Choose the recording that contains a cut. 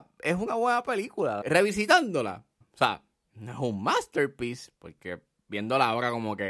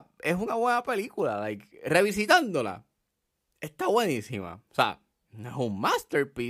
first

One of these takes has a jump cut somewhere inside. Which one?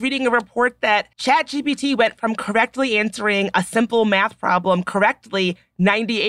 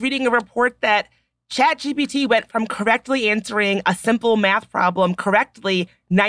first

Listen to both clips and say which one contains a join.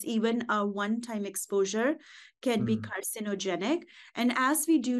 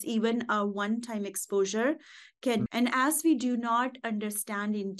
second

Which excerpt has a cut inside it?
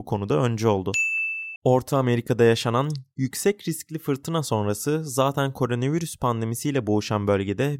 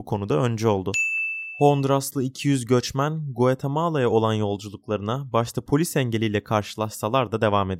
first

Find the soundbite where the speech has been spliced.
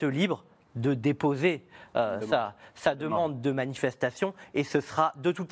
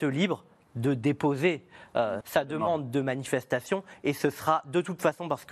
second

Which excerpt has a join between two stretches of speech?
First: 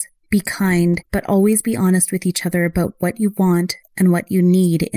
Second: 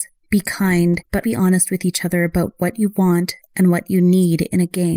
second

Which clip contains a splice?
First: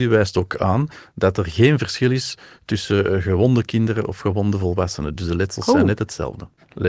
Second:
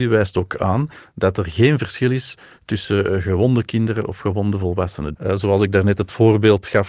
second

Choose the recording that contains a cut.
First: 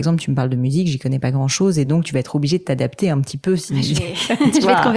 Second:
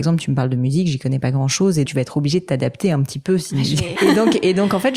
second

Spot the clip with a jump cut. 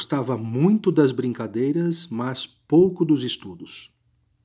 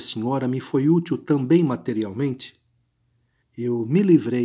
second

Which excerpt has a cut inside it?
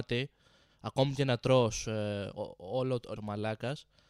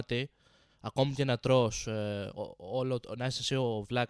first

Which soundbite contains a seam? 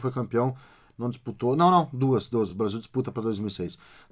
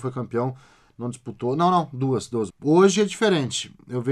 second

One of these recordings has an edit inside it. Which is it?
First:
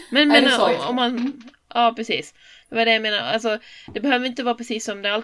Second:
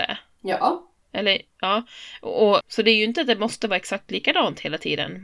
second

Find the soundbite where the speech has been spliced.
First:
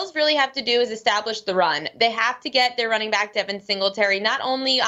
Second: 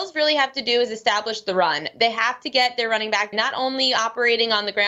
second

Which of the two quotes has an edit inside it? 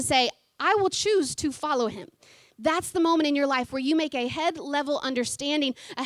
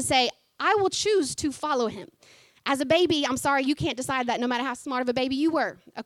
first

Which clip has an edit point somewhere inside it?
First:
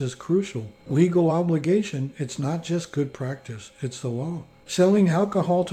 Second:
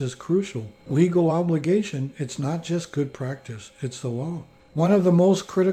second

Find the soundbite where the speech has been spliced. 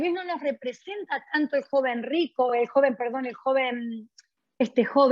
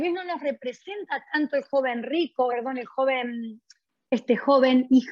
second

